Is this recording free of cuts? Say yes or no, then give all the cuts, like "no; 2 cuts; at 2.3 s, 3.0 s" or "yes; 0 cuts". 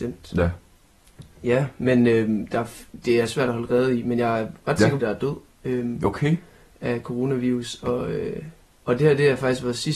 no; 1 cut; at 5.0 s